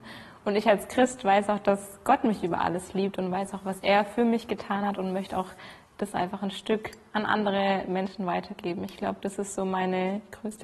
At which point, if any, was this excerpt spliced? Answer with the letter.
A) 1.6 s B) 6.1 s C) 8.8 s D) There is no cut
D